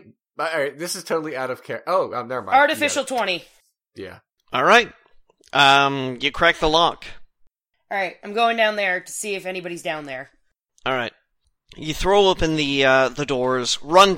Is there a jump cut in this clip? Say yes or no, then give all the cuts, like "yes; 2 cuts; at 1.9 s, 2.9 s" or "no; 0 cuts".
no; 0 cuts